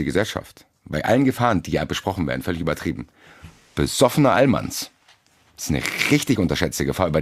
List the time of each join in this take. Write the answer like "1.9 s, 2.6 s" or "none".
none